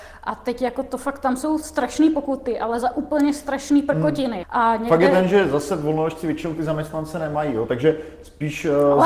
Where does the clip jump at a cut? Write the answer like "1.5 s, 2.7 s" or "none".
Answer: 4.4 s